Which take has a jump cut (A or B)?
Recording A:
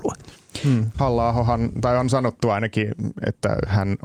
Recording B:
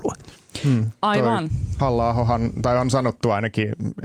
A